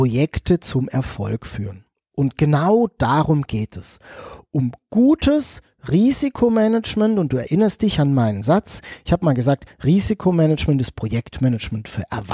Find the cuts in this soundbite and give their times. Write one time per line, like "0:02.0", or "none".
none